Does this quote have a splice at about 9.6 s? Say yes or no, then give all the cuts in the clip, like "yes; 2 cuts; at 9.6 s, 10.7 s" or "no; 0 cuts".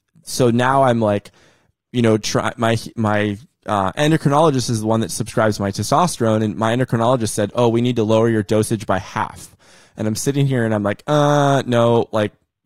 no; 0 cuts